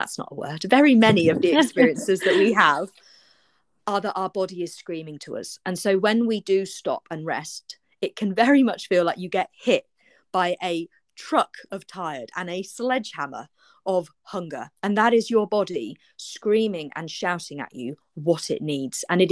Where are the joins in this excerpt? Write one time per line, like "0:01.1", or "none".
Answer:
none